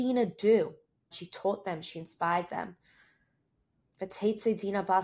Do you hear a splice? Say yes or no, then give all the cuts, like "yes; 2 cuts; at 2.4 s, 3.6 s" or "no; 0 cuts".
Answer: yes; 2 cuts; at 1.1 s, 3.8 s